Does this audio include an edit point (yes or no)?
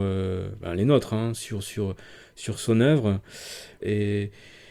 yes